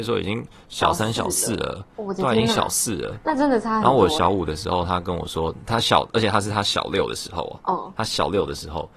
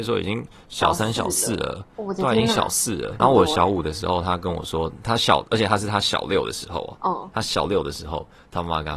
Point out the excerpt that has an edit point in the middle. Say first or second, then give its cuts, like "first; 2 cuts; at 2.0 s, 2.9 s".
second; 1 cut; at 3.2 s